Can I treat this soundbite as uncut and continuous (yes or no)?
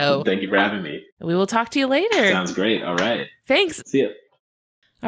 no